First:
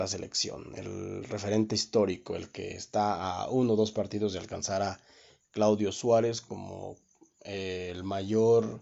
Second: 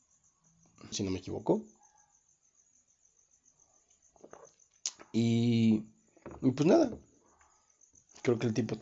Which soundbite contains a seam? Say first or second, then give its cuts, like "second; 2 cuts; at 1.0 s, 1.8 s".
second; 1 cut; at 0.9 s